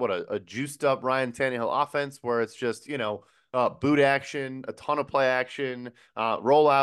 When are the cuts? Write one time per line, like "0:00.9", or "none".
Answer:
none